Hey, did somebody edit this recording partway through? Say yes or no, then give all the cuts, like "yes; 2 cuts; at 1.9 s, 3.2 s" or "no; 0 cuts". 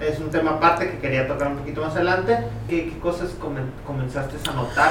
yes; 1 cut; at 2.7 s